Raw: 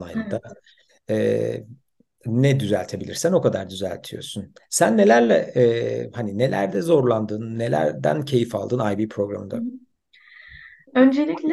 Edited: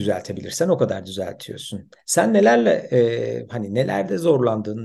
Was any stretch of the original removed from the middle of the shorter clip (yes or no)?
no